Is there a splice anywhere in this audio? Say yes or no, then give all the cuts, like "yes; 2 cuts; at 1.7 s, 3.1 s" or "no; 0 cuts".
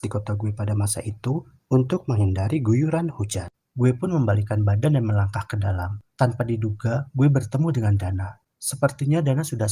yes; 2 cuts; at 3.6 s, 6.1 s